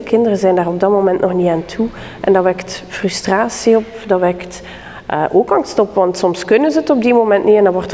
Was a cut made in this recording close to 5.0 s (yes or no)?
no